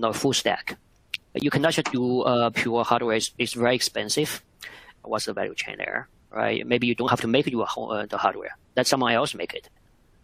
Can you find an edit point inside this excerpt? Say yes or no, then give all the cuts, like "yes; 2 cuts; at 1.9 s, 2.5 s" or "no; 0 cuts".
yes; 2 cuts; at 1.2 s, 5.0 s